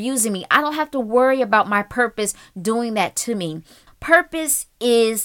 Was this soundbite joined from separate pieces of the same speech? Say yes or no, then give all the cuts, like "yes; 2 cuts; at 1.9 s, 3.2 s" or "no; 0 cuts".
yes; 1 cut; at 3.9 s